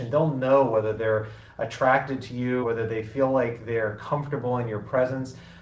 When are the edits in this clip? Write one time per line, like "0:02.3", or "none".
0:02.6